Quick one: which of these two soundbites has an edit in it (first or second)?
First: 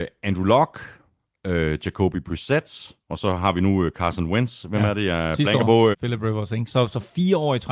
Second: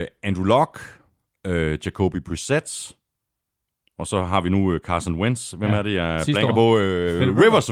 first